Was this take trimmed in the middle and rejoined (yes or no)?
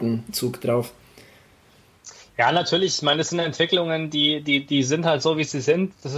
no